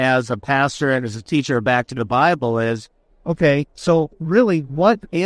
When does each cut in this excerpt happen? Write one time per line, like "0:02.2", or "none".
none